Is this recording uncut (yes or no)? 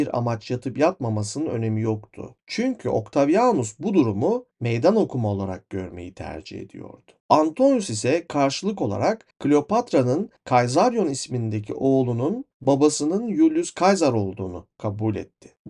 yes